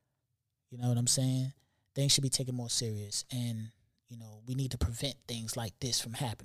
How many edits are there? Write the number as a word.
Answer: zero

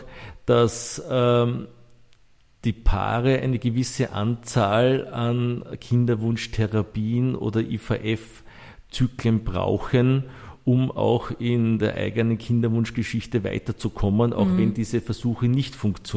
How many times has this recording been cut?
zero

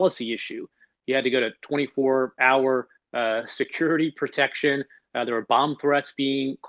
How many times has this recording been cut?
one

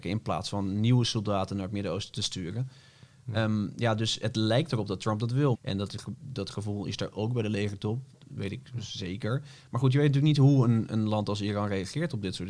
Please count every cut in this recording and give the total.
two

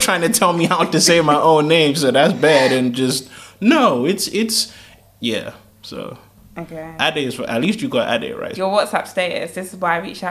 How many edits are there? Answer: one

